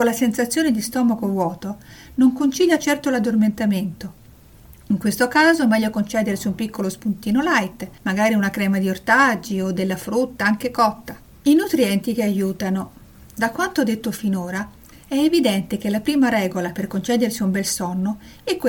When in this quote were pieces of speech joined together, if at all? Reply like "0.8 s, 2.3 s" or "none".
none